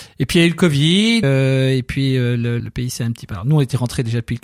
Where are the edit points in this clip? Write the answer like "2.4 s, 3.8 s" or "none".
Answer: 1.2 s, 2.6 s